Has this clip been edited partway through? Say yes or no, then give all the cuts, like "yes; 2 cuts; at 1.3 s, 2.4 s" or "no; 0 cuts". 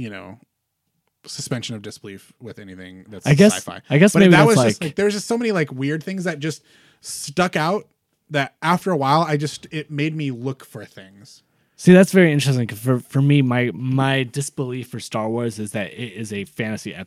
no; 0 cuts